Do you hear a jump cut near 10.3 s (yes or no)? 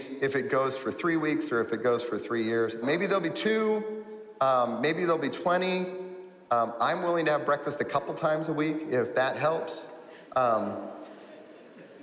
yes